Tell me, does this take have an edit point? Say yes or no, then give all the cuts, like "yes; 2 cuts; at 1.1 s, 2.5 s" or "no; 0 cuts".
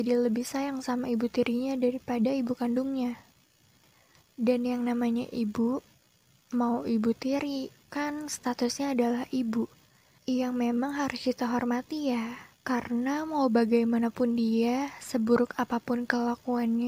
yes; 1 cut; at 7.8 s